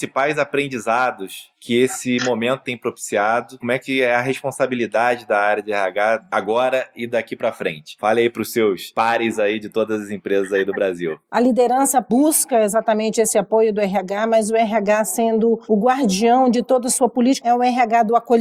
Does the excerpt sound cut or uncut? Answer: cut